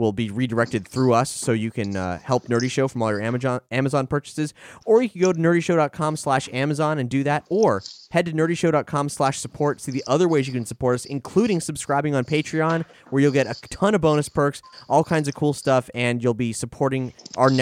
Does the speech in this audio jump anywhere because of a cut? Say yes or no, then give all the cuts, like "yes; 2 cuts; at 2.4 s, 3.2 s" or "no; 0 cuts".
no; 0 cuts